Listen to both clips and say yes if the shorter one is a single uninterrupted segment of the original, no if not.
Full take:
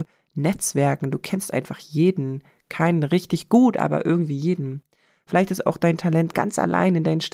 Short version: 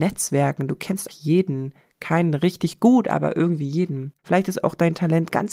no